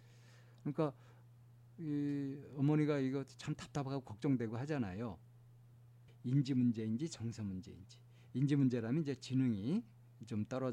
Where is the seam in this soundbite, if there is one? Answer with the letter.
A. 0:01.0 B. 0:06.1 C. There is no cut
B